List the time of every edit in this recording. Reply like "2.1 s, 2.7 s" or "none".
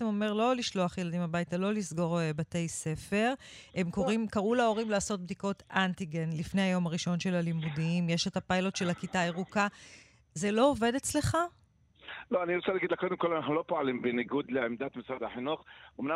none

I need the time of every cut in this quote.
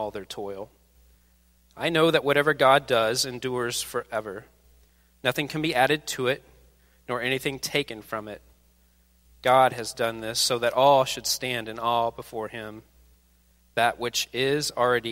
none

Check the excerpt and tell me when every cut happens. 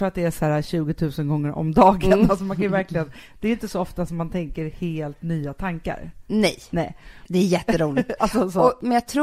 7.3 s

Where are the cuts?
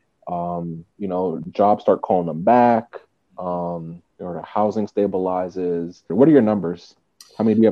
4.1 s, 6.1 s

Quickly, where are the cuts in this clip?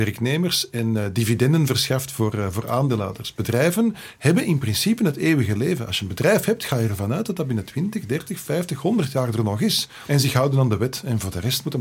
10.1 s

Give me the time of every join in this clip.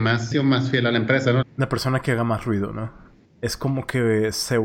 1.4 s, 3.3 s

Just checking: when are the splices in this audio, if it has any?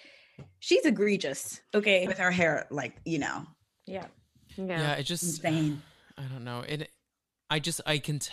2.1 s

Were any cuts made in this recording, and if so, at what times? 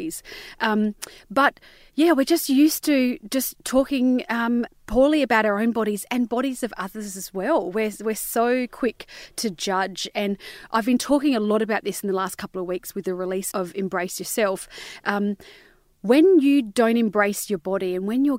4.7 s, 13.5 s

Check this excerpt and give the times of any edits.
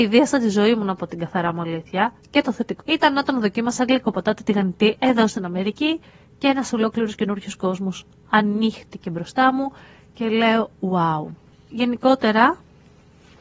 2.8 s

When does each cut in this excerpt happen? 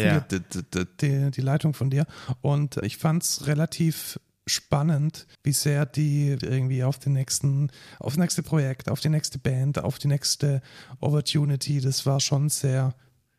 2.8 s, 5.3 s, 6.4 s

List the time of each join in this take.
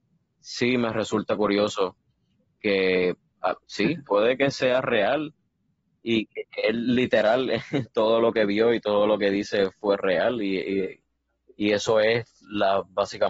4.1 s

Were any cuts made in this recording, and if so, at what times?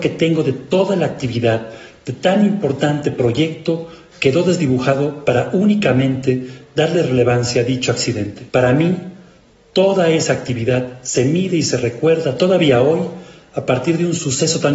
8.5 s

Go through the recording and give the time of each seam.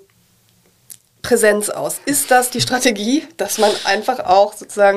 none

